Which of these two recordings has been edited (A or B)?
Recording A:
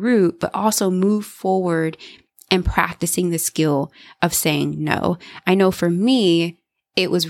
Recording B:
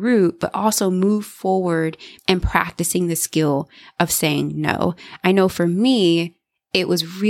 B